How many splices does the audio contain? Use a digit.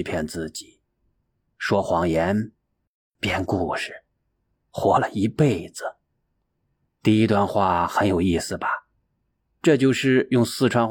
0